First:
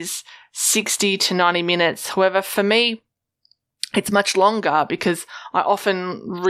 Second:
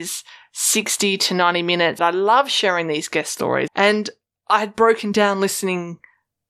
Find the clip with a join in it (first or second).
second